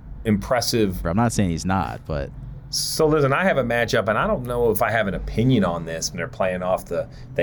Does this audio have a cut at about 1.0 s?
yes; 2 cuts; at 1.0 s, 6.1 s

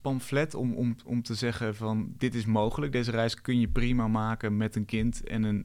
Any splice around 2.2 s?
yes; 1 cut; at 2.2 s

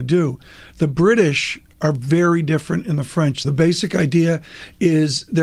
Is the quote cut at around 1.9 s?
no; 1 cut; at 3.4 s

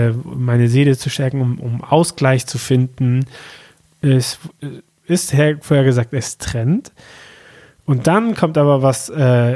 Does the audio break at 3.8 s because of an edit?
yes; 1 cut; at 3.8 s

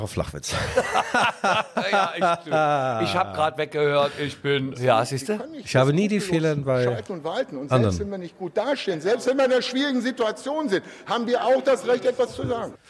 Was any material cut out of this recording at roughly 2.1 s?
no; 1 cut; at 4.7 s

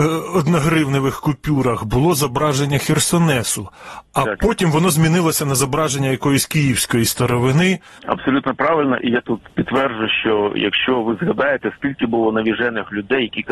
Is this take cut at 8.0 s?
yes; 1 cut; at 8.0 s

